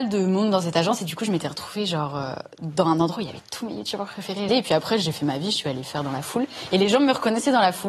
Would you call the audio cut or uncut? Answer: cut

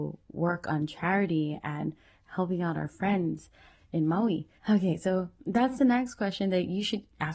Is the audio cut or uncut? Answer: cut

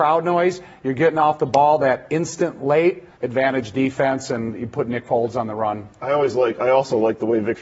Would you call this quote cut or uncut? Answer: cut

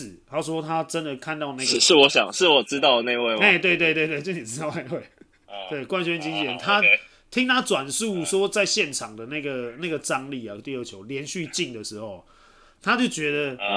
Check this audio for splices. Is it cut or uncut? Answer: cut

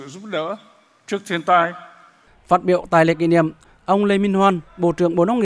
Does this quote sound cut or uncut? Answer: cut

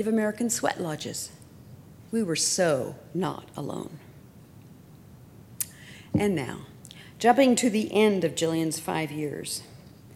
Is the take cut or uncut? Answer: cut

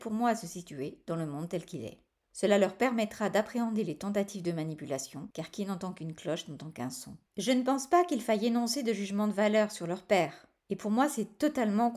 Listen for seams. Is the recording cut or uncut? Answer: cut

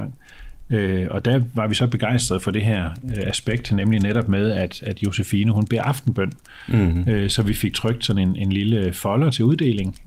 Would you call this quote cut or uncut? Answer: uncut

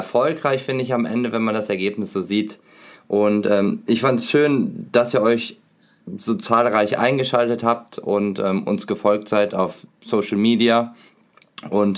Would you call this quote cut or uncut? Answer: uncut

